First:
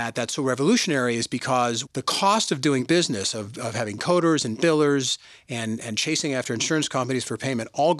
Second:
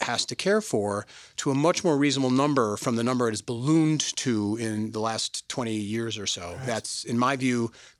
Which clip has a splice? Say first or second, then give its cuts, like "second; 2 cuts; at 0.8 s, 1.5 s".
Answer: first; 1 cut; at 1.9 s